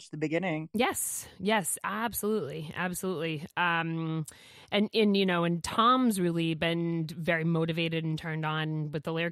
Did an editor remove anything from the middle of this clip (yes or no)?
no